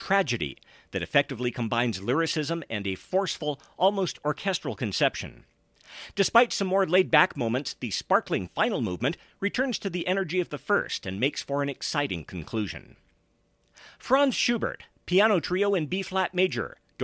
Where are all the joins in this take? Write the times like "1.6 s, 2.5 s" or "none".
none